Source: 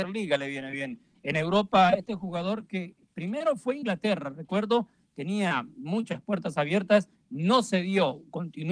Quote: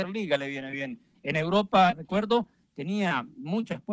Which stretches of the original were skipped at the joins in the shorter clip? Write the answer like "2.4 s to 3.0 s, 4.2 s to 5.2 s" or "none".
1.9 s to 4.3 s

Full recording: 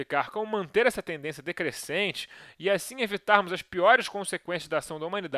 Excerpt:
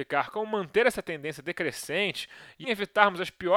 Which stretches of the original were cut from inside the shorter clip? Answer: 2.6 s to 3.0 s

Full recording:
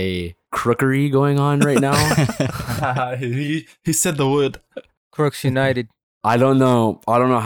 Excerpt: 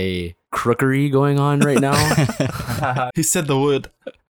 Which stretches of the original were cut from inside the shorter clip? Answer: 3.1 s to 3.8 s

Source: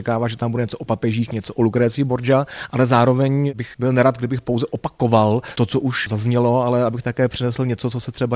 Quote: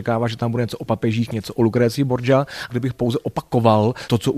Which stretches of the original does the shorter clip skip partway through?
2.7 s to 4.2 s

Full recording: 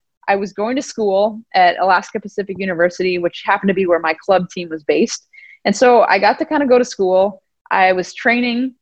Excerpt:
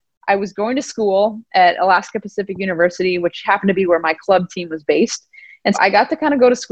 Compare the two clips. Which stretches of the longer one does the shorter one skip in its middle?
5.7 s to 6.0 s

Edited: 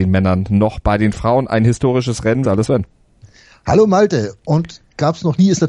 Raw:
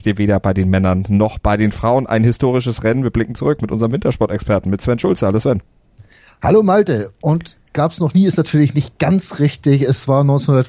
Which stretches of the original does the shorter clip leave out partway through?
3.0 s to 5.2 s

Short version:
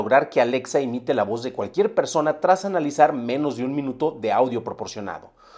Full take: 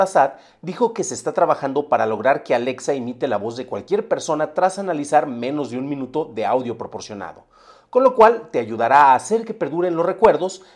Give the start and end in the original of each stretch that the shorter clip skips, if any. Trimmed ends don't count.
none

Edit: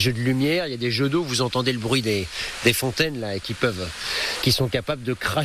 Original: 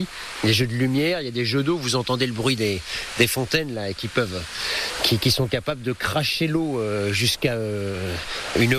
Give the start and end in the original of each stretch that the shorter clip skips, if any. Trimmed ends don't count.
5.0 s to 5.2 s

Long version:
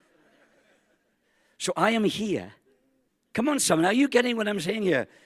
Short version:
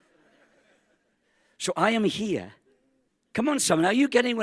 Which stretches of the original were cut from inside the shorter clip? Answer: none

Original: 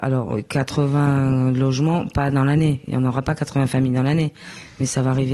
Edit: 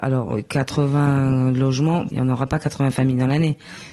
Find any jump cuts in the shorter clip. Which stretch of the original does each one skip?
2.1 s to 2.9 s

